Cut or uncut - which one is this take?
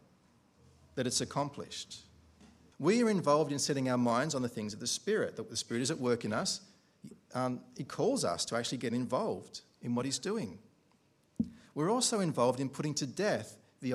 cut